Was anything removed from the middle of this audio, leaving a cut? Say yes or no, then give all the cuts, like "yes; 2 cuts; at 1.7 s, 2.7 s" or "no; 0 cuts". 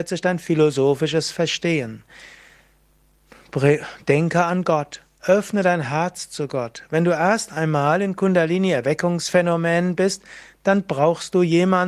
no; 0 cuts